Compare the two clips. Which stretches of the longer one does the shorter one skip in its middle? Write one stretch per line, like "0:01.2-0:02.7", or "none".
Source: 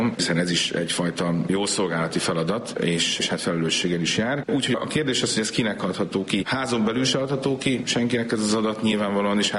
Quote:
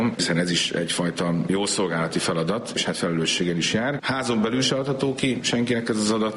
0:02.7-0:03.2
0:04.4-0:06.4